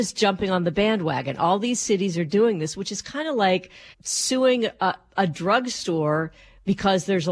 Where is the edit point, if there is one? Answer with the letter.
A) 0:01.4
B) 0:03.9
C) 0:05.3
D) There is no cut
B